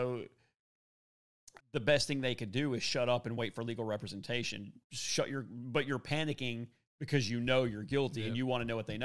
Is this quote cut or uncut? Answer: cut